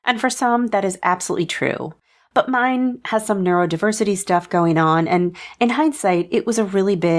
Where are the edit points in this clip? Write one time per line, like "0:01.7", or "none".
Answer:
none